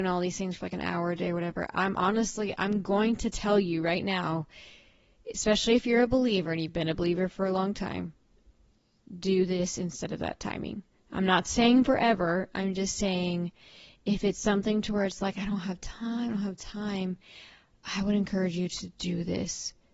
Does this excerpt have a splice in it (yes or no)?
no